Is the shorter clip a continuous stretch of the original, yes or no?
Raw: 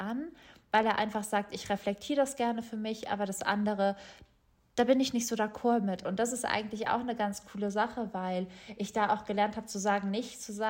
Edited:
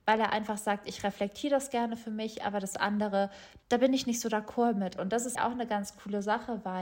no